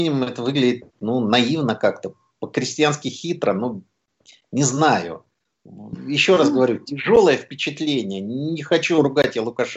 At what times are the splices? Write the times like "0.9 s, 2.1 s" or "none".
none